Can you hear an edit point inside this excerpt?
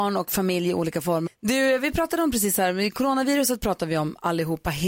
yes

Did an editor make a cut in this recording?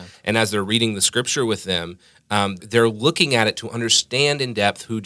yes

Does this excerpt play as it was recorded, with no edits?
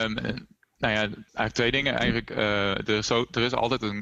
no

